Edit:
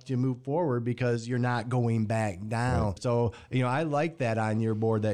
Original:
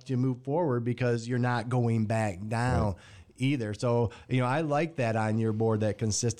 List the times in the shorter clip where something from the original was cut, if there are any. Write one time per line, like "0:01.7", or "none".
0:03.0